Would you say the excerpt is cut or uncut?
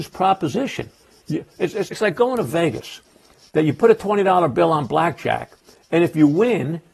cut